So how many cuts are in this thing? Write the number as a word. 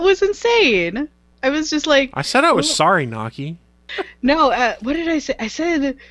one